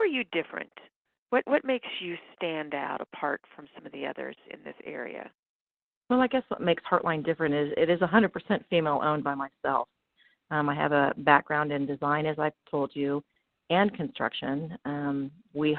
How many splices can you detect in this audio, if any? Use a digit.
0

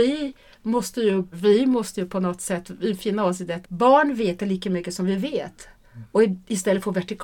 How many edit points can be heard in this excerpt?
2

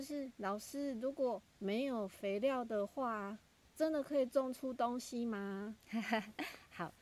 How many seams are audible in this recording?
1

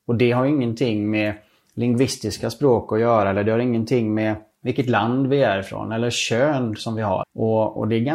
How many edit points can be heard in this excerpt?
1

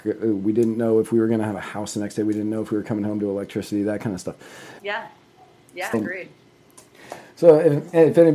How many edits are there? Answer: 2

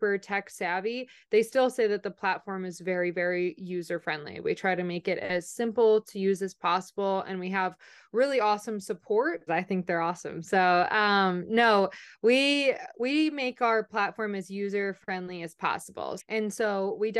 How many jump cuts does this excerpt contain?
2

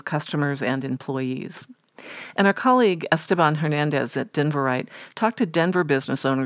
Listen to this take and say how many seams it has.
0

